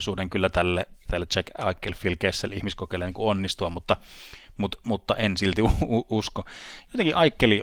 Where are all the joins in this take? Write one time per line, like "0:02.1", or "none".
0:01.1